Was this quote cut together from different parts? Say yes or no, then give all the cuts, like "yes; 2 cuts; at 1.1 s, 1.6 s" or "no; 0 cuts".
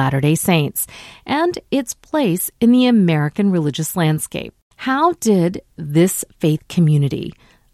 no; 0 cuts